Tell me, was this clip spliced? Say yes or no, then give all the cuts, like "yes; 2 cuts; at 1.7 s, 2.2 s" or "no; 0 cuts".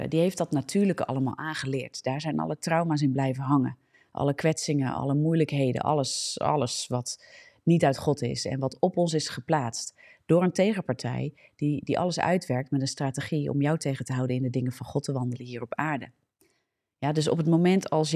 no; 0 cuts